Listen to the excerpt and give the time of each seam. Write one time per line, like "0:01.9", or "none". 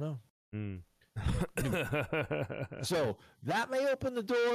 0:01.1

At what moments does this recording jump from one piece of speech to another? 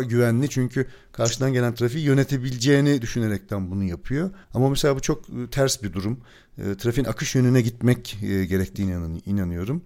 none

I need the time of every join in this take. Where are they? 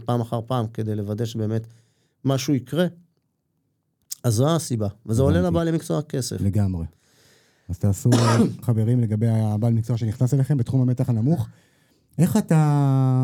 0:08.6

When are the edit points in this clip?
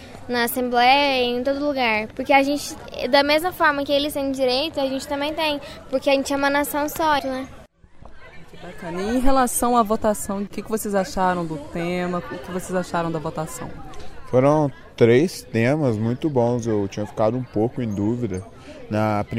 0:07.2

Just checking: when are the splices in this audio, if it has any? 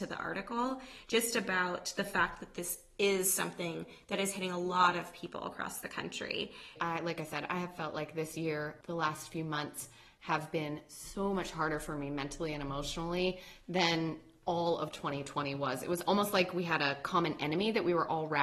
0:06.8

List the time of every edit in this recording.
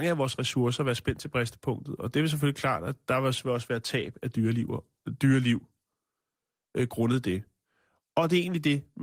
none

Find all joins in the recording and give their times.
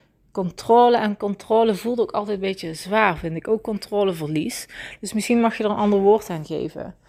none

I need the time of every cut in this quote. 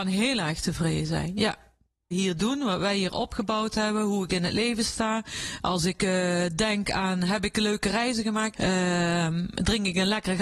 0:02.1
0:08.5

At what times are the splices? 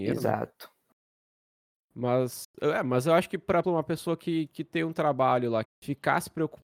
0:03.6
0:05.6

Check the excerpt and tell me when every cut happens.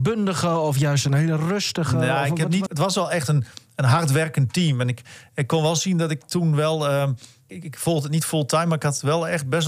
0:02.7
0:07.5

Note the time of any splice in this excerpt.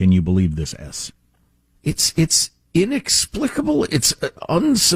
none

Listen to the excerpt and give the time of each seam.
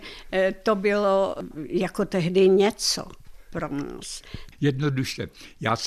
0:04.5

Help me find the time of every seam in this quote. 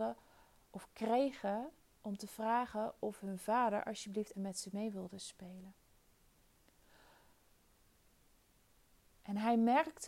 0:04.3
0:09.1

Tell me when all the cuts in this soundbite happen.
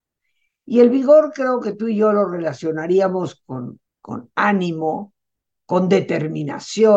0:03.8

